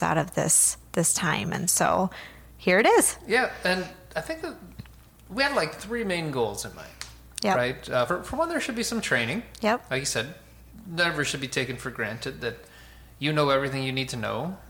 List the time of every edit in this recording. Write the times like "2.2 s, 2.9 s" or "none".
none